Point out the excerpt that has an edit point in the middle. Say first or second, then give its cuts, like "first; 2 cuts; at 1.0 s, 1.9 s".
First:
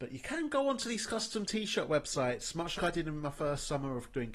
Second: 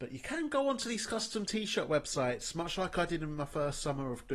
first; 1 cut; at 2.8 s